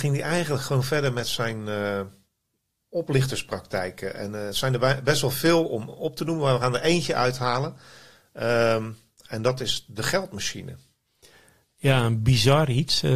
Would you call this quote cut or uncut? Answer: uncut